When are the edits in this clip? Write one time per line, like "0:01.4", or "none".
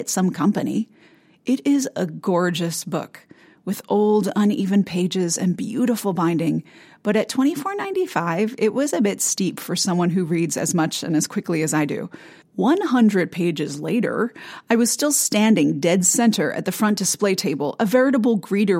0:12.4